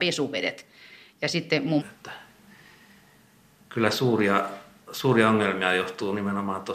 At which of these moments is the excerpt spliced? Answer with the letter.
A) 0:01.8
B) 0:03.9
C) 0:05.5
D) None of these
A